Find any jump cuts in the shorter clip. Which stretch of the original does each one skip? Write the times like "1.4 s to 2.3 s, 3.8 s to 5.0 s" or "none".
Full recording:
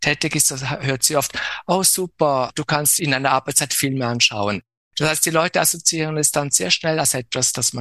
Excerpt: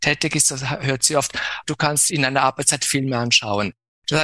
1.6 s to 2.5 s